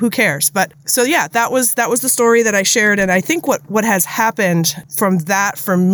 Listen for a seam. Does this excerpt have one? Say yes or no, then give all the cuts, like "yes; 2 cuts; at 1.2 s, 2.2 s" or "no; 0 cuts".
no; 0 cuts